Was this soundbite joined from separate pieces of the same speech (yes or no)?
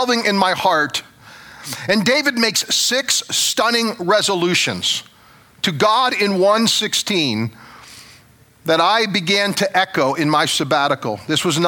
no